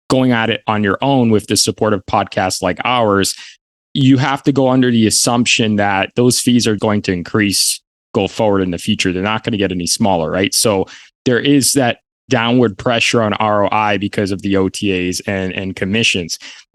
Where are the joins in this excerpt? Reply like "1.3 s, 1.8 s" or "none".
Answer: 6.8 s